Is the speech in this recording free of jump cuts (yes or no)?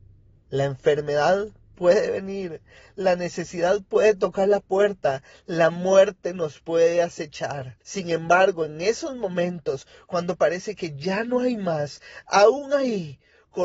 no